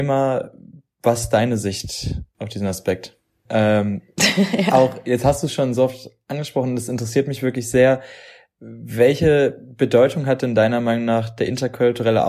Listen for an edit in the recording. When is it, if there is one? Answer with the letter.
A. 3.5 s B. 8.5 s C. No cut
A